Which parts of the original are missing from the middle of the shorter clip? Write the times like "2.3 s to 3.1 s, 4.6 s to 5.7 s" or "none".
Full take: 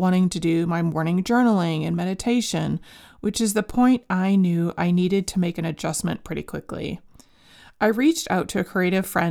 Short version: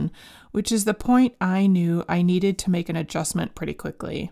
none